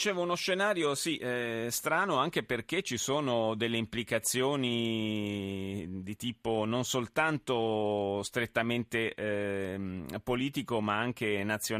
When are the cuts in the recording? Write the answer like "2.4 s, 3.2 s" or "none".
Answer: none